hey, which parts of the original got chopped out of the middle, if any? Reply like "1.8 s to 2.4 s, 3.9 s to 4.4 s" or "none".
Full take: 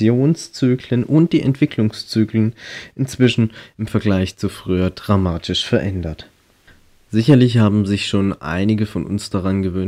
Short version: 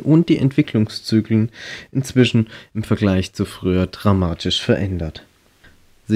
none